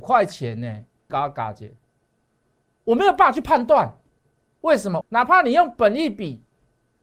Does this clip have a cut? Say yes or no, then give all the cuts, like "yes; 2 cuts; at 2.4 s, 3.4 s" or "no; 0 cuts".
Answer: yes; 2 cuts; at 1.1 s, 5.0 s